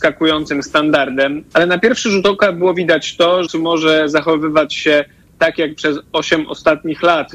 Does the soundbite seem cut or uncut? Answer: cut